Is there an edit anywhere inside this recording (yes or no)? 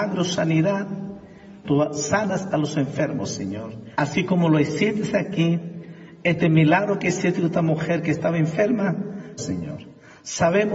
yes